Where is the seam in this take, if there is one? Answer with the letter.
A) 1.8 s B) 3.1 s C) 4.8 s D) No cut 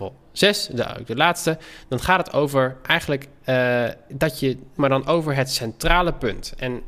C